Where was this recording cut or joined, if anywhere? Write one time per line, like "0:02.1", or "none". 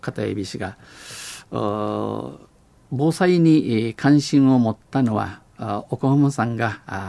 none